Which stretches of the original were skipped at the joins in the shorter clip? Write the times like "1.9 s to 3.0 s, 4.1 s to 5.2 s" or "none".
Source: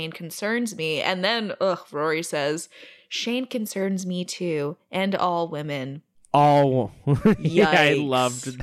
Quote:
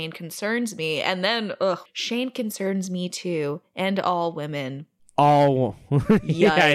1.9 s to 3.0 s